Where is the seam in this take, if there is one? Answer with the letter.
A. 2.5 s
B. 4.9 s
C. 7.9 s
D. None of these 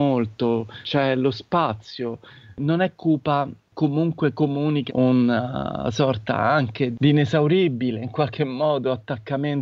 B